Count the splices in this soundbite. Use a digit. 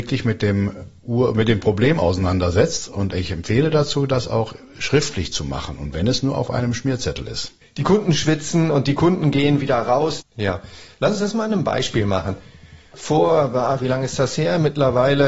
2